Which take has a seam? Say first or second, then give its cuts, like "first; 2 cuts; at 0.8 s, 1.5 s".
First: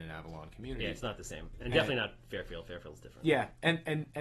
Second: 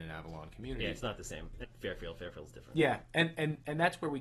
second; 1 cut; at 1.6 s